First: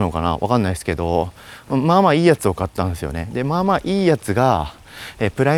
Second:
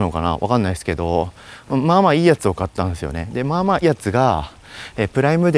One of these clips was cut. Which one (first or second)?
second